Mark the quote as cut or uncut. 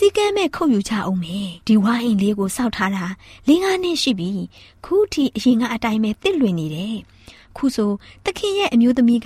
cut